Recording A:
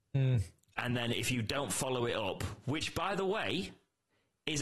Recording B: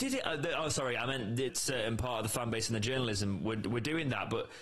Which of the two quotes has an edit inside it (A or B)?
B